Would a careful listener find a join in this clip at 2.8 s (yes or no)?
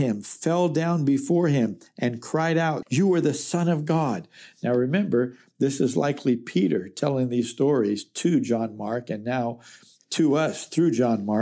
yes